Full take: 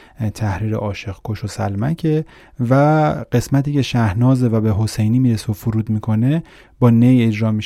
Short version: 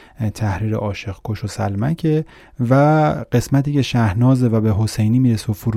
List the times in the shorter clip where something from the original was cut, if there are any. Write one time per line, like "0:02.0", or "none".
none